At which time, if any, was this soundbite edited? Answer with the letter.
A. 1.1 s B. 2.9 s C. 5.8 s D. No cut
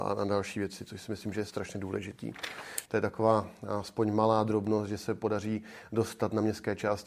B